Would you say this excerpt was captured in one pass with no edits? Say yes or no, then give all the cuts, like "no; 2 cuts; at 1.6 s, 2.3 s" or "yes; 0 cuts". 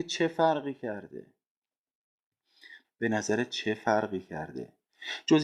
no; 1 cut; at 2.8 s